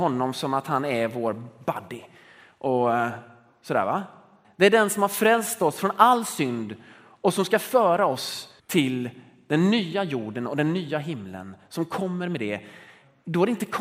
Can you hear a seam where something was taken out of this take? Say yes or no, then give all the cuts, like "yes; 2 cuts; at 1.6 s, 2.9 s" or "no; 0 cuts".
yes; 2 cuts; at 4.4 s, 8.6 s